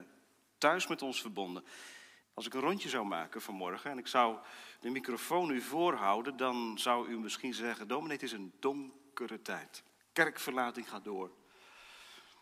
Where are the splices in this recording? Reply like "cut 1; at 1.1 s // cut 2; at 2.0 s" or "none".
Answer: cut 1; at 2.2 s // cut 2; at 10.0 s